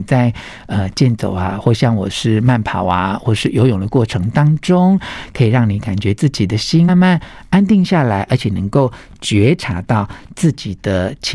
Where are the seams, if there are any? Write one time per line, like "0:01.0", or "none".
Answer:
0:06.9